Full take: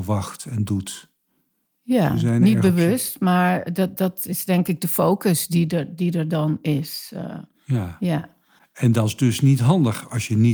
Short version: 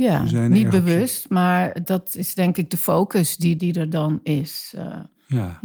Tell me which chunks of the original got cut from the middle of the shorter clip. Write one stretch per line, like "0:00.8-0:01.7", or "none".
0:03.7-0:03.9
0:05.7-0:06.0